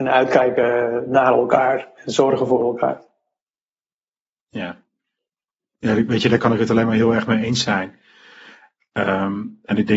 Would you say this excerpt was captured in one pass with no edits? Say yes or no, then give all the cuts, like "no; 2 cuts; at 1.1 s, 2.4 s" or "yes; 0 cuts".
yes; 0 cuts